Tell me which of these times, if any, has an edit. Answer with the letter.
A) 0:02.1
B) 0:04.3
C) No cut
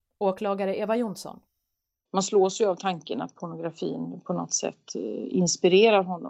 A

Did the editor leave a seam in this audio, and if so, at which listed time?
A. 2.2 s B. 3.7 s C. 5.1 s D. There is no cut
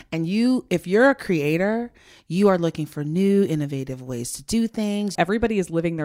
C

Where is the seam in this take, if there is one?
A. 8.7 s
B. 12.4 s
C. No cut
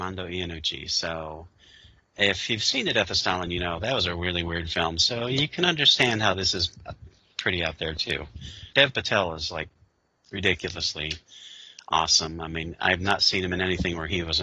A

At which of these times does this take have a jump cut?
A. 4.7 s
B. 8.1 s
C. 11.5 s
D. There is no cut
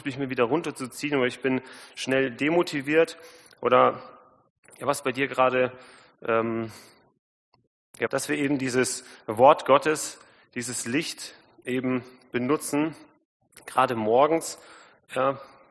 B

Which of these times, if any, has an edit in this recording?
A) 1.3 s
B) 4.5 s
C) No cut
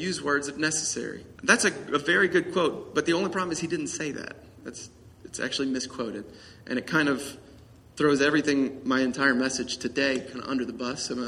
A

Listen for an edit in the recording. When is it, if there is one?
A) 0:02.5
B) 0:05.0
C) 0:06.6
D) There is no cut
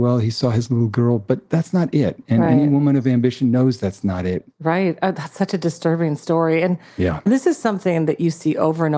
D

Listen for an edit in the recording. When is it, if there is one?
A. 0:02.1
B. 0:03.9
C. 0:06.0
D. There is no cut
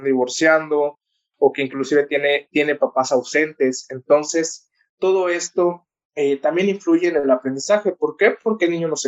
D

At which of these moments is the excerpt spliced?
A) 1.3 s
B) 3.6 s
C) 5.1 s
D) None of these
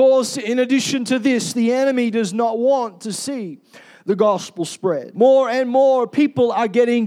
C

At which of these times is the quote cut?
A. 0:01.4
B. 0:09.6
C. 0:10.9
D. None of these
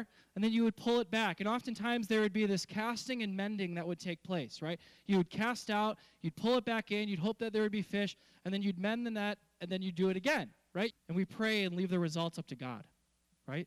C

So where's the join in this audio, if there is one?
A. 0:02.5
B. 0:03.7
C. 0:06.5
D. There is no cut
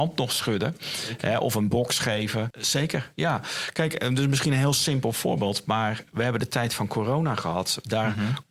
A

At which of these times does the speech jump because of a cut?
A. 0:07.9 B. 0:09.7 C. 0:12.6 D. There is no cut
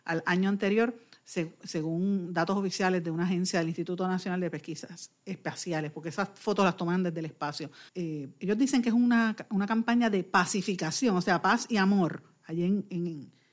A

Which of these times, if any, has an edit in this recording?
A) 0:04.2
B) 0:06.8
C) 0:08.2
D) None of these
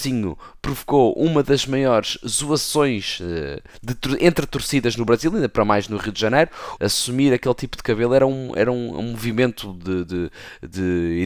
B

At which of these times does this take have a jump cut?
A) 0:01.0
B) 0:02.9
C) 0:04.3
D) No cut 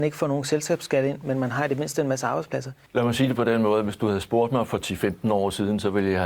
B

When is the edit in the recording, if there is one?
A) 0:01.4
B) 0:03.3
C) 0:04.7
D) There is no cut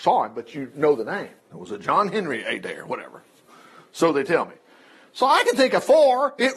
A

